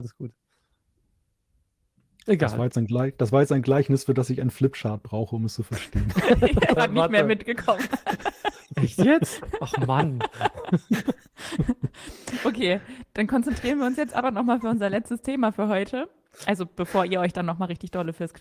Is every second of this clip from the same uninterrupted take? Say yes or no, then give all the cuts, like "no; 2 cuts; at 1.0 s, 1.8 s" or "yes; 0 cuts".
no; 1 cut; at 6.8 s